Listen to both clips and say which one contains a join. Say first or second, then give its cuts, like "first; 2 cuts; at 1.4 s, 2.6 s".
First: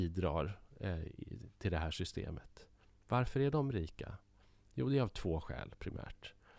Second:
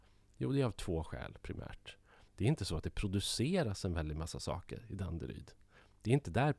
second; 1 cut; at 2.3 s